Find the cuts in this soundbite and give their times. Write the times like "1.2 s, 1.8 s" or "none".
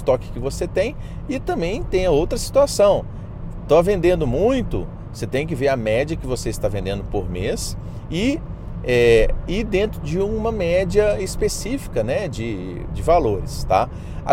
12.9 s